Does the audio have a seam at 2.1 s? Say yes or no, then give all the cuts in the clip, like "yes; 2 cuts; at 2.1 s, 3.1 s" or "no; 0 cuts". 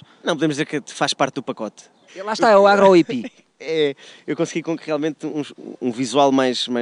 no; 0 cuts